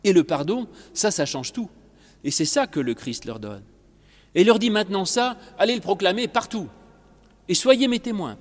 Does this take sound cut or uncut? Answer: uncut